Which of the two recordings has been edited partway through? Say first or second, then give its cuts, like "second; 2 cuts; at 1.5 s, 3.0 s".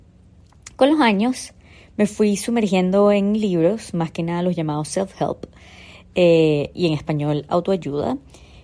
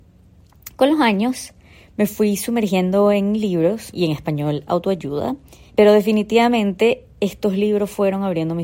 second; 2 cuts; at 3.9 s, 5.7 s